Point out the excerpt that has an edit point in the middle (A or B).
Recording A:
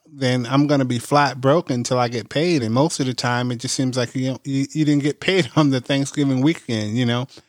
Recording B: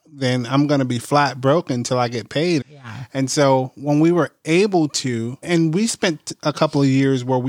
B